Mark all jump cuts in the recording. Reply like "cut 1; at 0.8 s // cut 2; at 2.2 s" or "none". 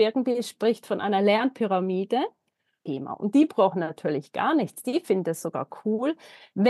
cut 1; at 2.9 s